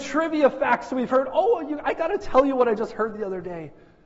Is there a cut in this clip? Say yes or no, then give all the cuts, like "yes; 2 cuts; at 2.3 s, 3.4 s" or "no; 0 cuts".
no; 0 cuts